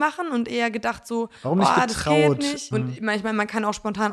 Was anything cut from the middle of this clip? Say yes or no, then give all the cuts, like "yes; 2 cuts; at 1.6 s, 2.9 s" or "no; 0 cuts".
yes; 1 cut; at 2.7 s